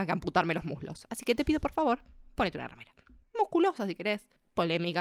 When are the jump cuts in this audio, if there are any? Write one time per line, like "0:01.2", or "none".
0:03.2